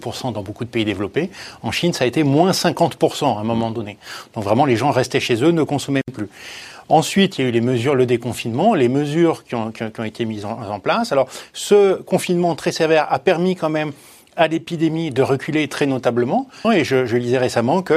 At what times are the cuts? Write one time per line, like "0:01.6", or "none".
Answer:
0:16.6

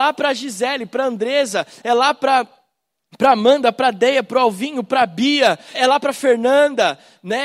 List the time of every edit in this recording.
0:01.8
0:05.7

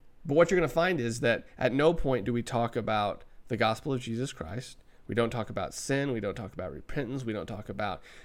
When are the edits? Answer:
none

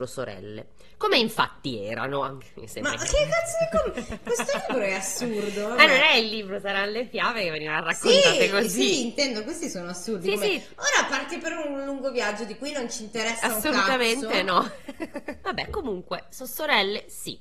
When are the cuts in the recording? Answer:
0:15.4

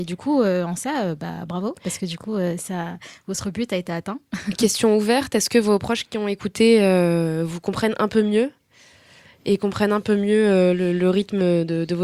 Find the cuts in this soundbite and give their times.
none

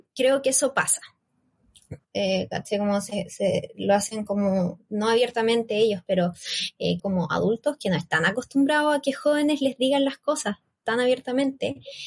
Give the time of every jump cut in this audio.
0:02.0
0:07.0

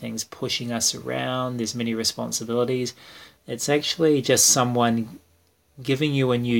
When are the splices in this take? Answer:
0:03.4

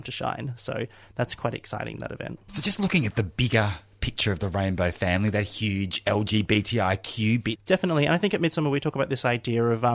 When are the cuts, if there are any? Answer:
0:02.5
0:07.6

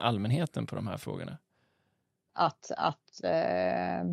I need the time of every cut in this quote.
0:02.3

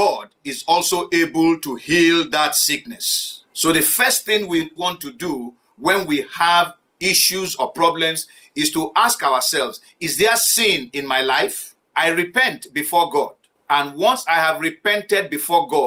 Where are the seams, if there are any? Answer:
0:03.5
0:04.8
0:11.9

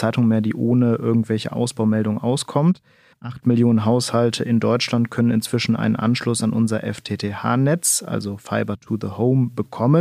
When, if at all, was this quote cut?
0:03.1

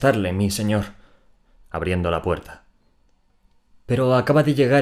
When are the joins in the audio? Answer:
0:01.6

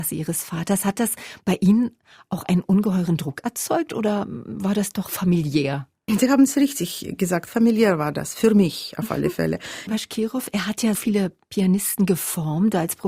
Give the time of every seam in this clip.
0:05.1
0:09.9
0:10.9

